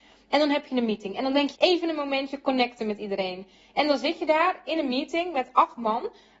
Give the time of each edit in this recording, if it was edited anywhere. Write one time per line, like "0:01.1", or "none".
0:01.5